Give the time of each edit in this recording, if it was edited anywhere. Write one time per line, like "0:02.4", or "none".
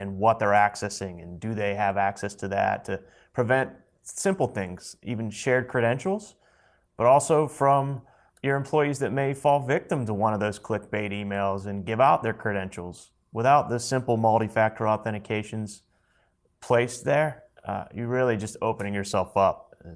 none